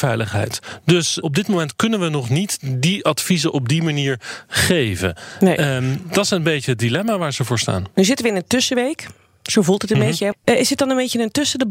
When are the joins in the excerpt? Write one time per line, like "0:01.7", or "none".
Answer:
0:01.2
0:10.3